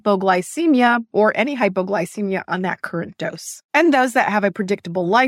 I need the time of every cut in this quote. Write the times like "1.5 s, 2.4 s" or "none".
none